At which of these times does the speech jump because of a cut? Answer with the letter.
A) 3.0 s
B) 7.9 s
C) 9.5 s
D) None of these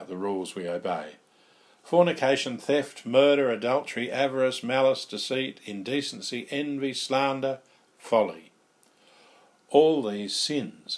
B